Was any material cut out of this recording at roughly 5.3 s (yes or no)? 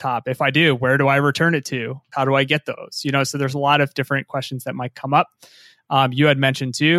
no